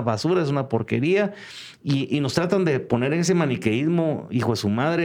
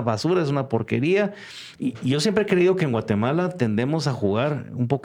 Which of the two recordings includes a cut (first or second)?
second